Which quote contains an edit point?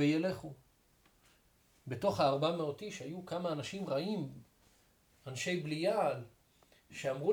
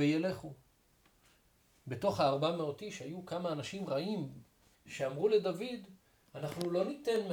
second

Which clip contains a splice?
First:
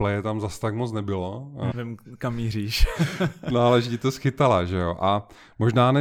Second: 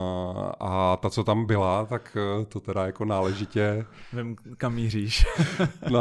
first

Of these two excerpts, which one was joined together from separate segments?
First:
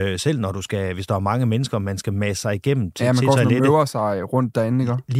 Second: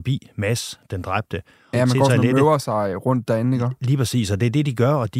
second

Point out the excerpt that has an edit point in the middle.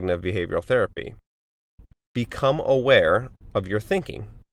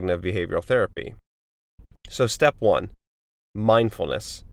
first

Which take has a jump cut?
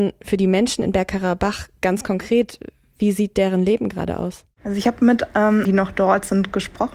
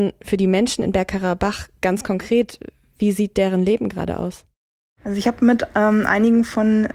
first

